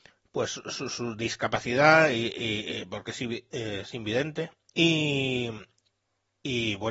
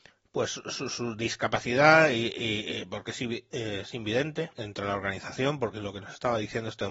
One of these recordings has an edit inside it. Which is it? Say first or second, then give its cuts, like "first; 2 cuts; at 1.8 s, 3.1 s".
second; 1 cut; at 4.5 s